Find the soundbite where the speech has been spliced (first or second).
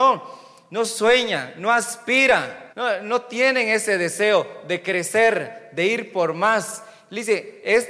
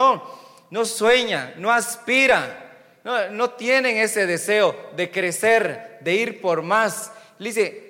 first